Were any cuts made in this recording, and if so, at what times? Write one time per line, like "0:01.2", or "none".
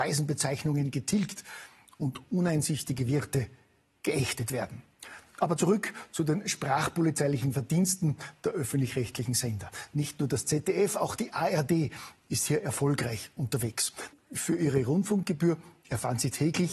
0:14.1